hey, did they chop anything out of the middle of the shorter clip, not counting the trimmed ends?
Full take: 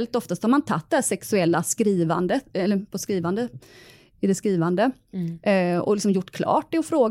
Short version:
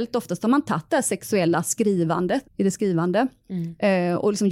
yes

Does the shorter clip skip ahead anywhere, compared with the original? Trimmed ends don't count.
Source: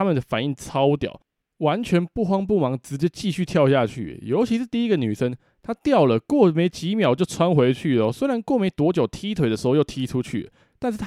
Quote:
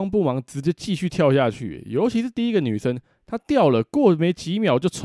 no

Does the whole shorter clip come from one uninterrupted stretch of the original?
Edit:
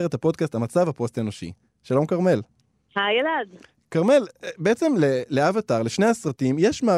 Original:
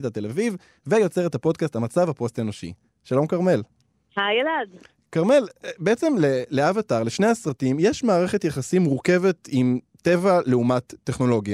yes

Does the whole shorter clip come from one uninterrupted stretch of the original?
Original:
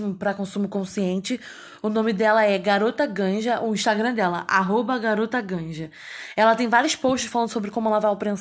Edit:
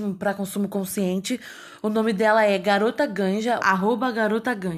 no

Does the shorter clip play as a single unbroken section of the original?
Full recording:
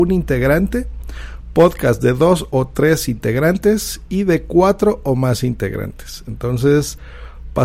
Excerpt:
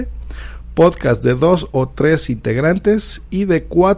yes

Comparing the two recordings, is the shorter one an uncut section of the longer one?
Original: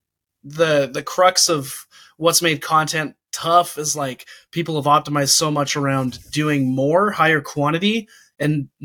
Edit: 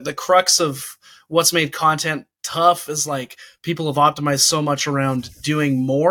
yes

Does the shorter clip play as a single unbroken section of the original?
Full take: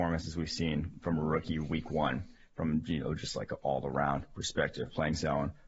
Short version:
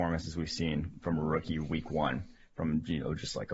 yes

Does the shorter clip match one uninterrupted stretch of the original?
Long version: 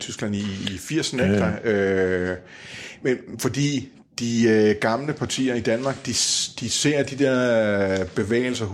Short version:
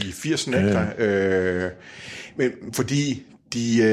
yes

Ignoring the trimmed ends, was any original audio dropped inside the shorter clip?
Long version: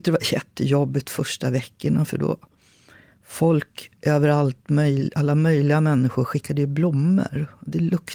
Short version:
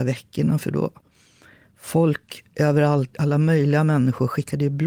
yes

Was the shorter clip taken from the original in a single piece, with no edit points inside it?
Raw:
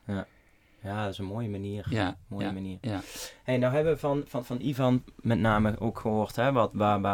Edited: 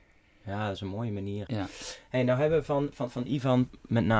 no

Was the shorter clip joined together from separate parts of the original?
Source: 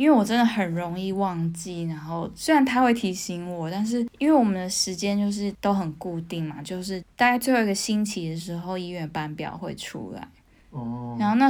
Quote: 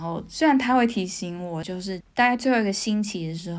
yes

